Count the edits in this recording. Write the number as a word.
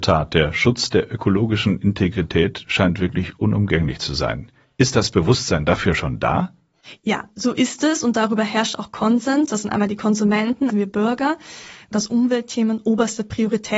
three